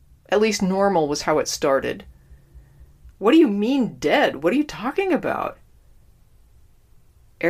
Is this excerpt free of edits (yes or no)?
no